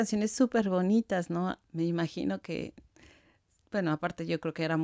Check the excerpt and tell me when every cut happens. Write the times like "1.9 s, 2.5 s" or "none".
1.6 s